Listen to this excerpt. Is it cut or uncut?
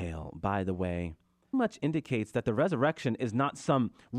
cut